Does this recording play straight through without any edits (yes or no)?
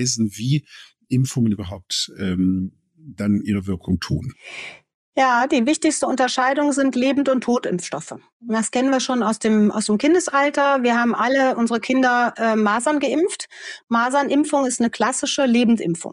yes